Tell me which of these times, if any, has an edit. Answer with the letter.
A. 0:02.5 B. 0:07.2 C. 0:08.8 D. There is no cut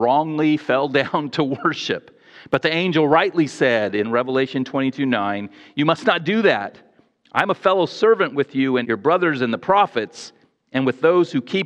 C